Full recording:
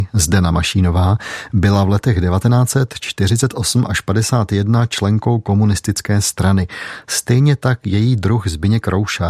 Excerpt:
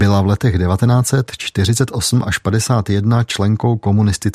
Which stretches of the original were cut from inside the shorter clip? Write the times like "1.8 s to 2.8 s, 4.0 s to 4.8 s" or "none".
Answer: none

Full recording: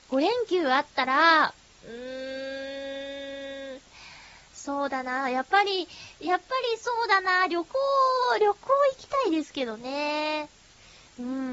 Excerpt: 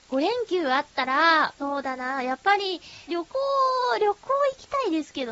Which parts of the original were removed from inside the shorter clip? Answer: 1.6 s to 4.7 s, 6.1 s to 7.5 s

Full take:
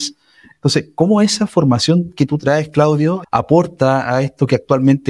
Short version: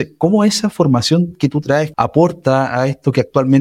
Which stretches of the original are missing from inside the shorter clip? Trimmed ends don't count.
2.7 s to 3.3 s

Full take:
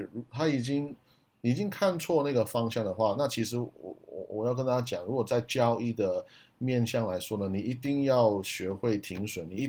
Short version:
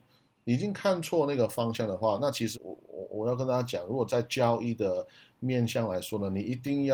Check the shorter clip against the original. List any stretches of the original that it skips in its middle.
3.5 s to 3.7 s

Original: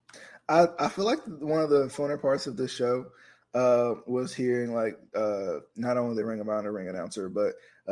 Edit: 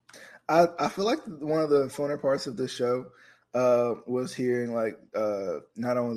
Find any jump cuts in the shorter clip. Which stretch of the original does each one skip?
none

